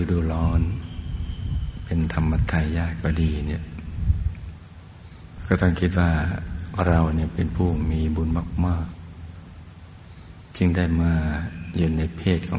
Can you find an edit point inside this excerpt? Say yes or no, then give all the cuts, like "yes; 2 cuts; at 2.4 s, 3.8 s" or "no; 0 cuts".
no; 0 cuts